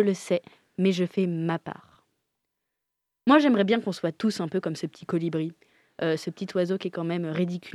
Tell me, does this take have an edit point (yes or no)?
no